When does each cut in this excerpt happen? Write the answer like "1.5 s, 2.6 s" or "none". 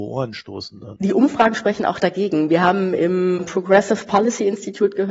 none